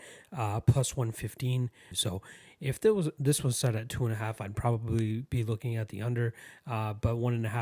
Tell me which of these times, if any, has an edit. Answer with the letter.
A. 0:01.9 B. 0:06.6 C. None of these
A